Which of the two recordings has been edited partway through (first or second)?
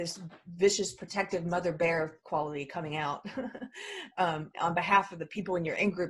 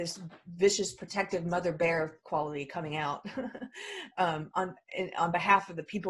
first